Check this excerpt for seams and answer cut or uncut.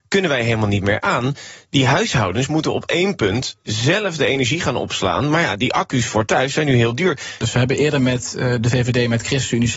cut